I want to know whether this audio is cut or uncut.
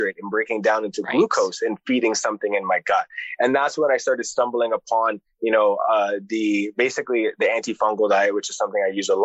uncut